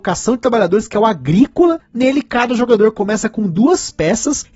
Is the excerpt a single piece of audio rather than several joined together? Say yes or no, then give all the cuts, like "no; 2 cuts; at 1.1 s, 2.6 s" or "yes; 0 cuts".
yes; 0 cuts